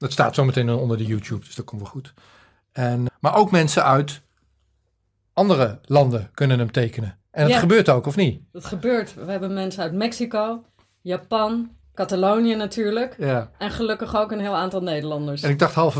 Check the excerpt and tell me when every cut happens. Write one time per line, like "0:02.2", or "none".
0:03.1
0:07.2
0:11.8